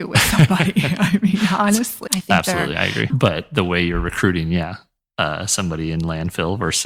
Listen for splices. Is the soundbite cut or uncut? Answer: cut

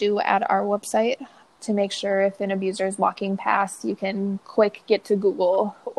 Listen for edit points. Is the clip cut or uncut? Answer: cut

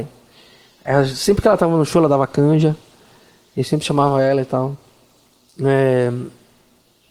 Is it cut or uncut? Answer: uncut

